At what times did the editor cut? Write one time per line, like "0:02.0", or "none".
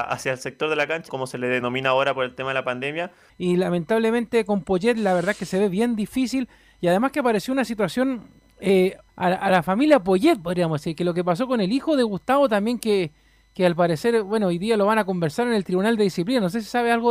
0:01.1
0:03.3
0:09.1